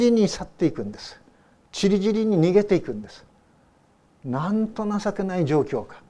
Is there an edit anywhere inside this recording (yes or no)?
no